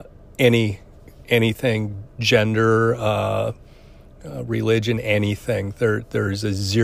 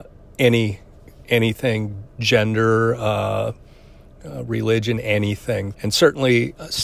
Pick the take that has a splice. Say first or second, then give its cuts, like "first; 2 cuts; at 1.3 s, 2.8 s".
second; 1 cut; at 5.7 s